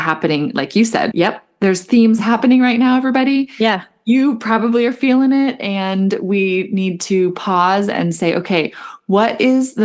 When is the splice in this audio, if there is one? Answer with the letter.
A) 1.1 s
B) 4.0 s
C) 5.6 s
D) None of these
A